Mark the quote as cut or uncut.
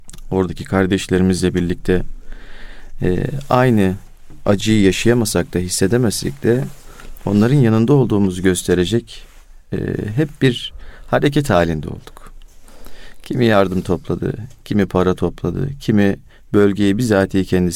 uncut